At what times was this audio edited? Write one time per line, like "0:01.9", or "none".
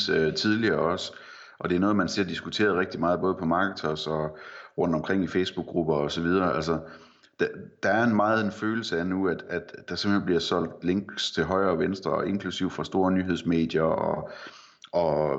none